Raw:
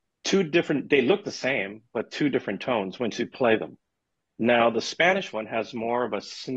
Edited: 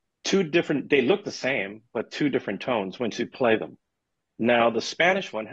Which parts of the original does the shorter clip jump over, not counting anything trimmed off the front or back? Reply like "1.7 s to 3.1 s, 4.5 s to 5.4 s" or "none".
none